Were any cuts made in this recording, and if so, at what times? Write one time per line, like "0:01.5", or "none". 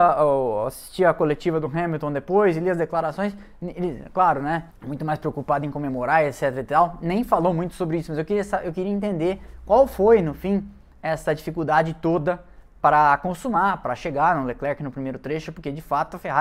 none